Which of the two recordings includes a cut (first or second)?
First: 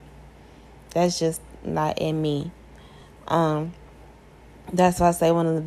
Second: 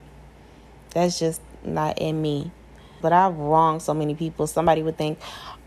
second